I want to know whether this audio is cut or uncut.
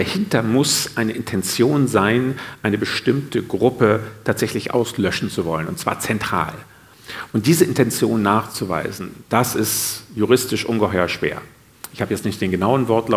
uncut